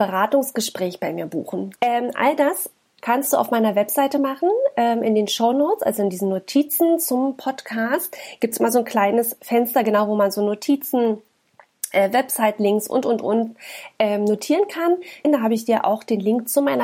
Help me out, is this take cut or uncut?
cut